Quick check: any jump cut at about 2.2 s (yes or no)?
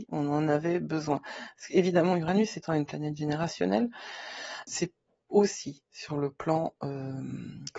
no